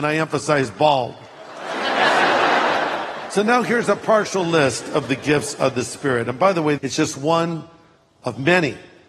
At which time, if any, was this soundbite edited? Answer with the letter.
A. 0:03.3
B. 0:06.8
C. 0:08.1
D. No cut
B